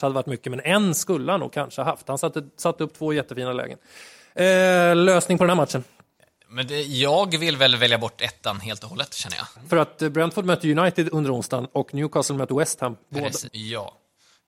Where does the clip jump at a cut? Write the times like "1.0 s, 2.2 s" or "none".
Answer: 9.6 s, 13.5 s